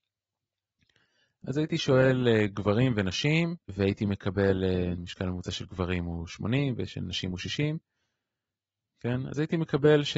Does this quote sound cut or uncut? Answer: cut